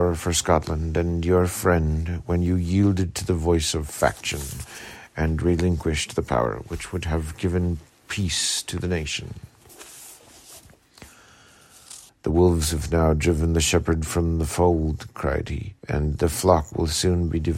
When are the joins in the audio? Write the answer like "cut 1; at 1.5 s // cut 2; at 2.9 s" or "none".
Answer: cut 1; at 12.1 s // cut 2; at 15.8 s

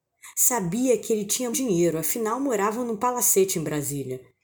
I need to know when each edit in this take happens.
cut 1; at 1.5 s

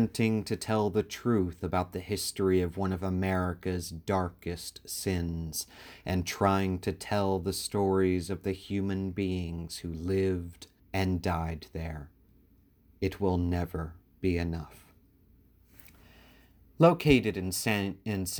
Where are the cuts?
cut 1; at 10.8 s

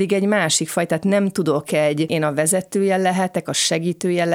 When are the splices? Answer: cut 1; at 2.1 s

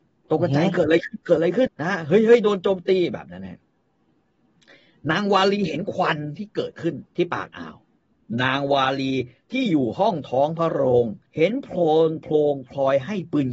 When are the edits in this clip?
cut 1; at 1.7 s // cut 2; at 7.1 s // cut 3; at 11.3 s

